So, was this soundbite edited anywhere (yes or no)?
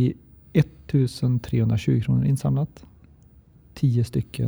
no